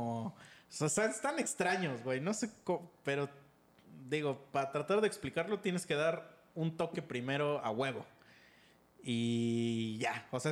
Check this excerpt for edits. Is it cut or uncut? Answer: uncut